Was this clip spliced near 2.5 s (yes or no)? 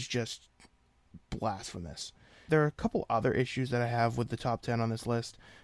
yes